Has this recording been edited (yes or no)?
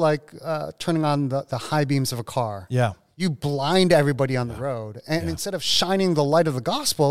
no